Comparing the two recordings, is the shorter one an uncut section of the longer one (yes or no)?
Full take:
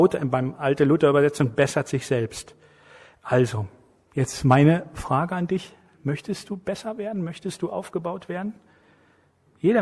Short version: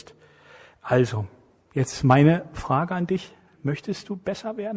yes